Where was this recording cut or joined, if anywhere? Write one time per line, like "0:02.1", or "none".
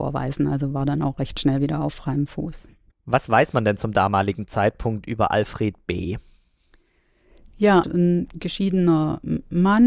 0:02.9
0:07.8

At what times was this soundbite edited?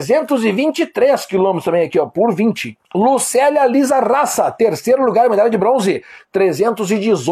0:02.9

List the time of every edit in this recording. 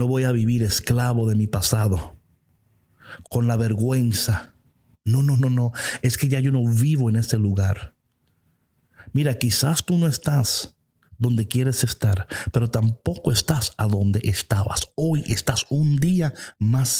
0:03.2

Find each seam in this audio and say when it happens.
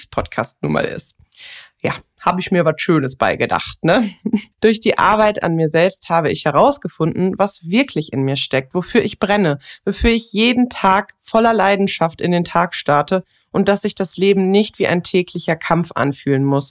0:04.5

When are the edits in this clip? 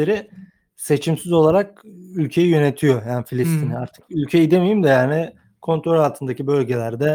none

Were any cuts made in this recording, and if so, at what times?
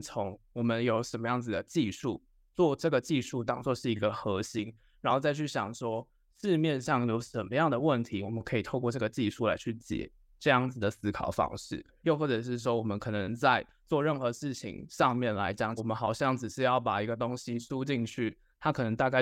0:12.0
0:15.8

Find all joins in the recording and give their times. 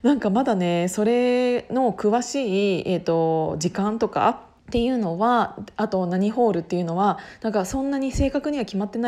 0:04.6

